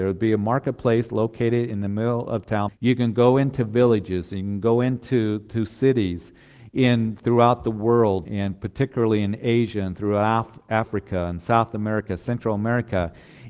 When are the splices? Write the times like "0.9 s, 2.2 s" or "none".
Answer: 2.7 s, 8.2 s